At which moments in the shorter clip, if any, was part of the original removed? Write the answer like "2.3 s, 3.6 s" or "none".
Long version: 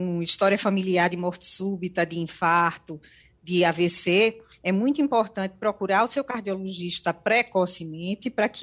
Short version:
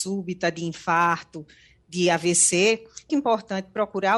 3.1 s

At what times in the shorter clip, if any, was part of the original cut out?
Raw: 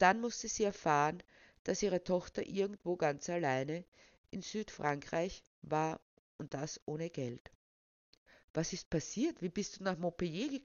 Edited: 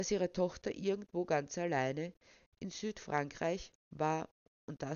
none

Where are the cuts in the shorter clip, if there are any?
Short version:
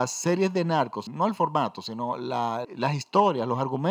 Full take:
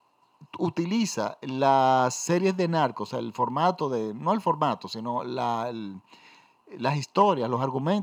1.1 s, 2.6 s

